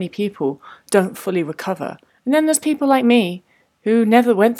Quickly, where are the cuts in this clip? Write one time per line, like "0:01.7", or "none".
0:02.1